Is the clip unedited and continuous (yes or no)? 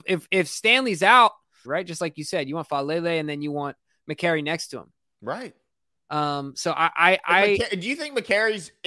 no